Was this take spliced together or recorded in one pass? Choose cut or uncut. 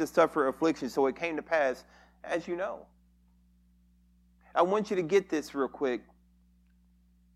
uncut